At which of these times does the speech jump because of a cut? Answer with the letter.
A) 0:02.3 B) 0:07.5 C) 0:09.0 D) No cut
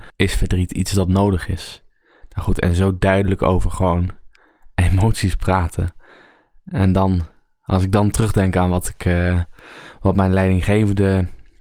D